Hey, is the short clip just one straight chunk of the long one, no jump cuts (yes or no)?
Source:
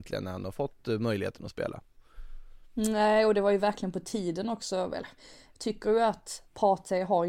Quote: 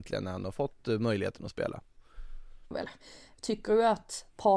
no